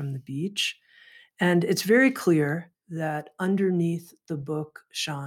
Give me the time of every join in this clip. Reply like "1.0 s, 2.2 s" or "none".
none